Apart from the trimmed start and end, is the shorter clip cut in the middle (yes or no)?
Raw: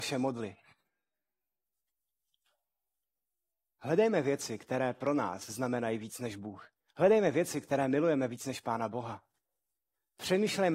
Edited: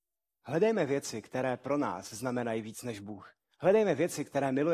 no